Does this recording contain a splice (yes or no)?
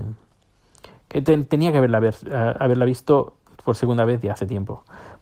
no